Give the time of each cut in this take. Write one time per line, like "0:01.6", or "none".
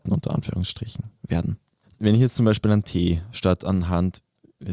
0:01.8